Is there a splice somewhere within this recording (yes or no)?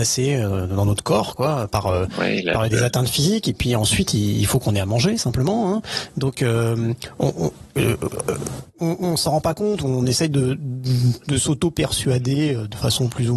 no